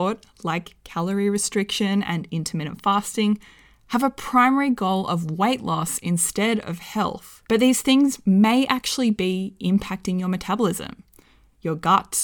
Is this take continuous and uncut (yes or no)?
no